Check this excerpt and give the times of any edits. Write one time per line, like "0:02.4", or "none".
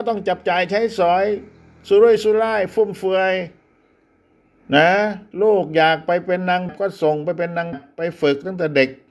0:06.7
0:07.7